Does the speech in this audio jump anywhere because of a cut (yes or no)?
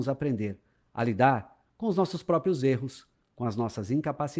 no